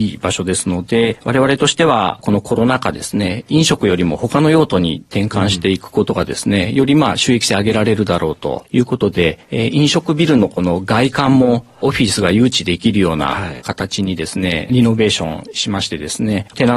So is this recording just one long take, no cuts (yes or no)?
yes